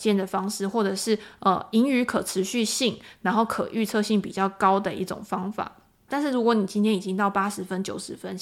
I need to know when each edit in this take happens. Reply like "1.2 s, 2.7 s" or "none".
6.1 s